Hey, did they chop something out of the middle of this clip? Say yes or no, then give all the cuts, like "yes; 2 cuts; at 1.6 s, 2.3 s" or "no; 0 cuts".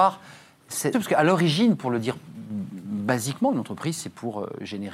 yes; 1 cut; at 0.9 s